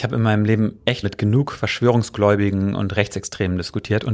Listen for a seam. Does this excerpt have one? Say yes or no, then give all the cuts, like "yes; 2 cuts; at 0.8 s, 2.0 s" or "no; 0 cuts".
yes; 1 cut; at 1.0 s